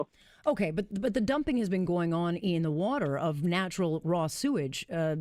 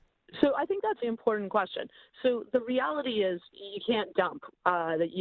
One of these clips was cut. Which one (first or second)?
second